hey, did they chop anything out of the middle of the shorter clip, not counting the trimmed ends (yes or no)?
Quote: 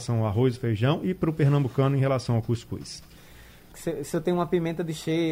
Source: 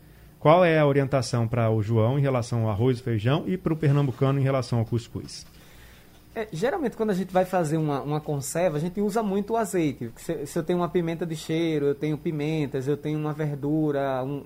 yes